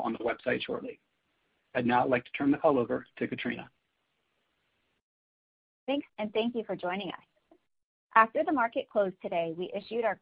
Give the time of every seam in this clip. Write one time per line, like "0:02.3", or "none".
0:06.1